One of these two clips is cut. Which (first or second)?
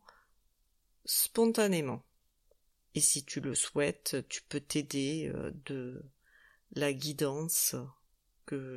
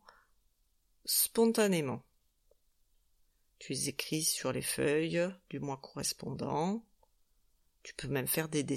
first